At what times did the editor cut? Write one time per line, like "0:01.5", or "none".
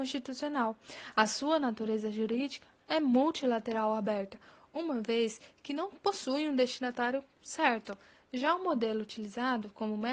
none